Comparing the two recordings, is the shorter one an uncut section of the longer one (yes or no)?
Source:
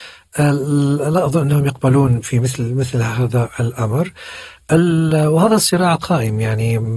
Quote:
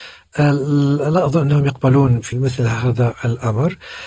no